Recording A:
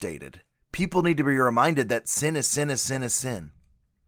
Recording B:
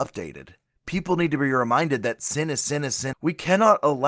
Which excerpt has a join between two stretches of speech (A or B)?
B